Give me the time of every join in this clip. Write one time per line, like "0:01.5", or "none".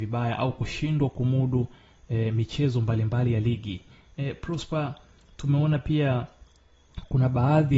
none